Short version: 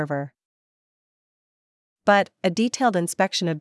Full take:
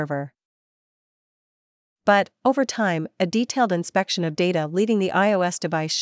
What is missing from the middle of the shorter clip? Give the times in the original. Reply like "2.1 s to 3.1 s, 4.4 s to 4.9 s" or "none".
2.4 s to 3.1 s

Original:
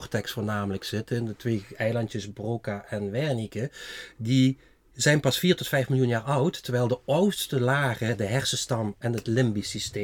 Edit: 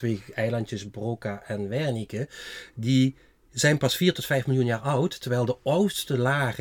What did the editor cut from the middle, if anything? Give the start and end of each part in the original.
none

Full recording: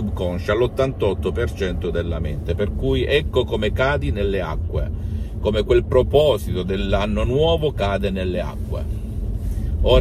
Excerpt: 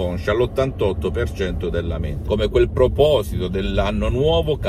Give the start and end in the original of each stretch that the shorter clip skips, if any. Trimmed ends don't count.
2.5 s to 5.4 s

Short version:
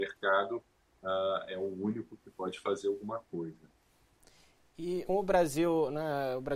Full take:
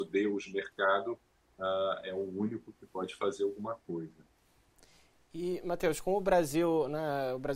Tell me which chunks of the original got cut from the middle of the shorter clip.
5.6 s to 6.0 s

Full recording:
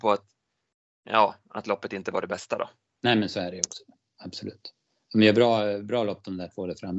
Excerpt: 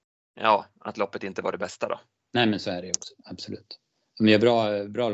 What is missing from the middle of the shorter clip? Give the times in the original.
3.9 s to 4.1 s

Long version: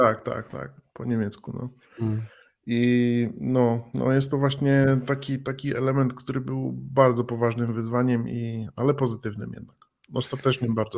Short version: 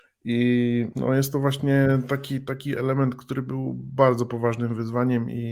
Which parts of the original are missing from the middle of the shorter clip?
3.3 s to 3.9 s

